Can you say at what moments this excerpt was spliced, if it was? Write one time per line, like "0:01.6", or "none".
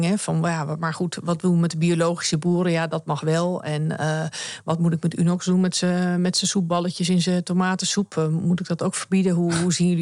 none